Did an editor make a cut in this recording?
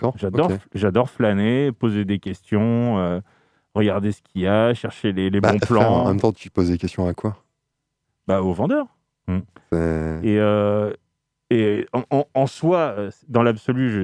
yes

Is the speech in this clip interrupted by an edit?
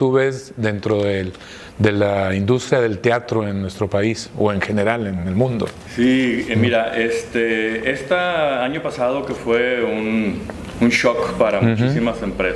no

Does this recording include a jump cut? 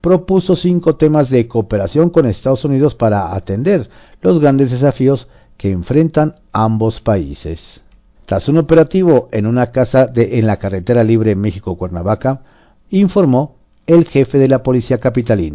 yes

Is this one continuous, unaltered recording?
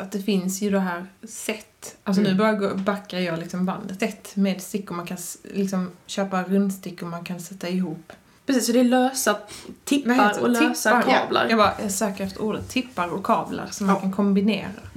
no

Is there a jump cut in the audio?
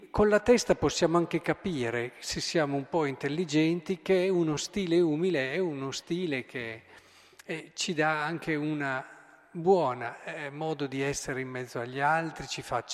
no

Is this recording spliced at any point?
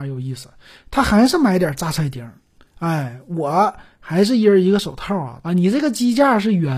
yes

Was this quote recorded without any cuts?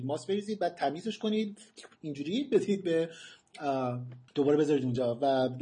no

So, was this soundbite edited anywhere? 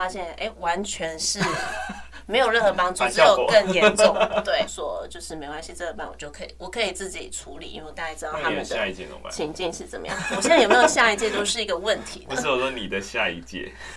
yes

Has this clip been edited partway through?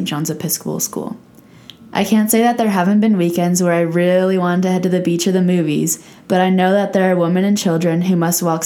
no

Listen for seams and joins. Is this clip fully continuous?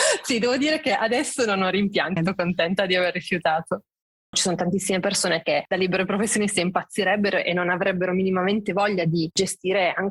no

